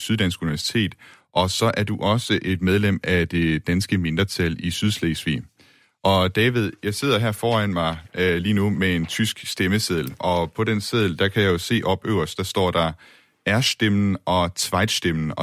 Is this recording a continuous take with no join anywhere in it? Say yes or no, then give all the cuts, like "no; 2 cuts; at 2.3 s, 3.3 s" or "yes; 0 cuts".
yes; 0 cuts